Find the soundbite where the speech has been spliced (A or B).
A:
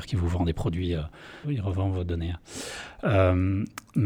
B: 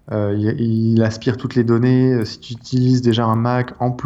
A